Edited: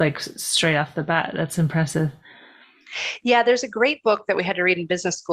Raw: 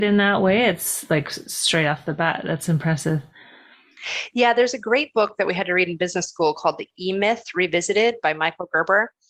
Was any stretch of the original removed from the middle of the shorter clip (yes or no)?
no